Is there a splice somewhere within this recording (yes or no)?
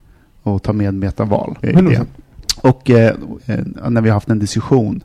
yes